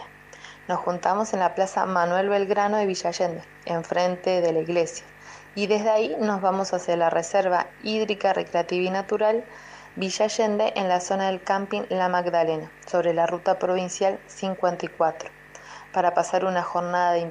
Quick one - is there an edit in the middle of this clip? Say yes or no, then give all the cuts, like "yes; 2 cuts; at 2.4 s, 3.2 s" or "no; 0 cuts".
no; 0 cuts